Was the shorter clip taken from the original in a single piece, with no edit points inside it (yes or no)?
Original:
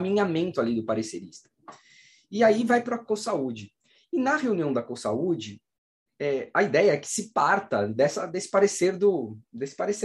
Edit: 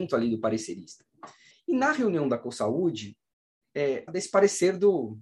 no